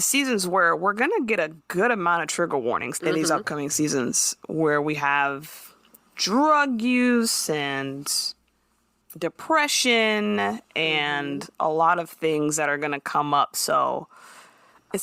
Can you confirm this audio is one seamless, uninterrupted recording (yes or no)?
no